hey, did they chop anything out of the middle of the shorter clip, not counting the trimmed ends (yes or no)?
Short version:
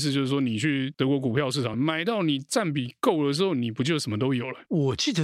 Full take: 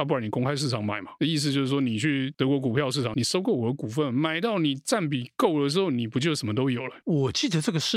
yes